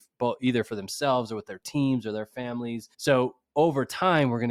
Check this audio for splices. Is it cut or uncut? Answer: cut